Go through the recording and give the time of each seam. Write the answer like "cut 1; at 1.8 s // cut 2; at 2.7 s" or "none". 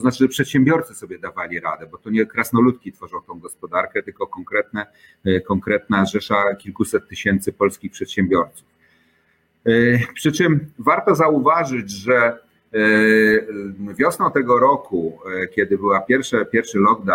none